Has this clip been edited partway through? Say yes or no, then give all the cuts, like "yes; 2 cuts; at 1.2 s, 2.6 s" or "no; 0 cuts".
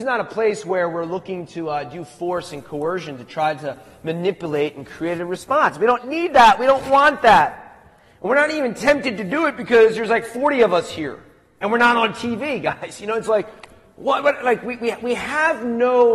no; 0 cuts